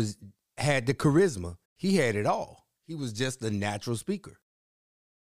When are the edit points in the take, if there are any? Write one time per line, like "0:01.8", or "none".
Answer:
0:01.6